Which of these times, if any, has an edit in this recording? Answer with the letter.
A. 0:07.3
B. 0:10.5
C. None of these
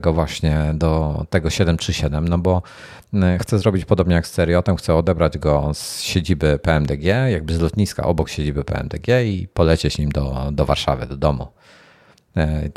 C